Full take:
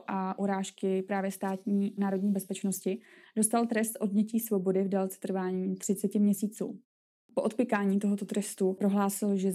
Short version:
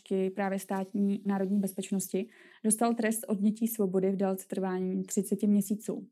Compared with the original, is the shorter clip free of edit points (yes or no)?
yes